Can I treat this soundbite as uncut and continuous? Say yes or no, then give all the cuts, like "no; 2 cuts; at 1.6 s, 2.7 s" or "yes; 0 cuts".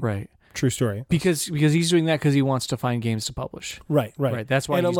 no; 1 cut; at 1.1 s